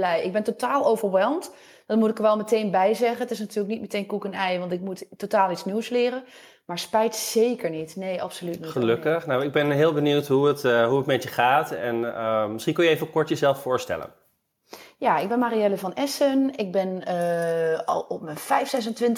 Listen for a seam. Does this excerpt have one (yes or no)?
no